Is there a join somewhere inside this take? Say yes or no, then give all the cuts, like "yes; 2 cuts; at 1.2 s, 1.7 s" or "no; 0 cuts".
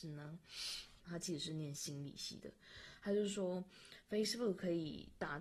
yes; 1 cut; at 1.0 s